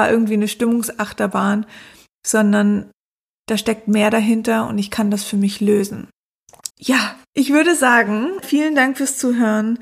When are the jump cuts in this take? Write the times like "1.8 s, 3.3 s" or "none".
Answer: 6.7 s, 8.4 s

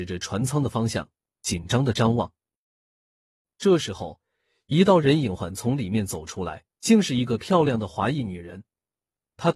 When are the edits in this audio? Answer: 5.4 s, 6.7 s

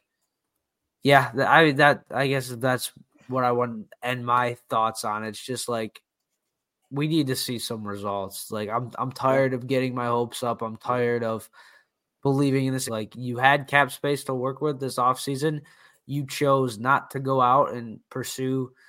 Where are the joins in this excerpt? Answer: 12.9 s

